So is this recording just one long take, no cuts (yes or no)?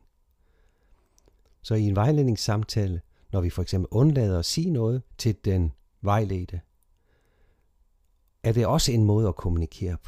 no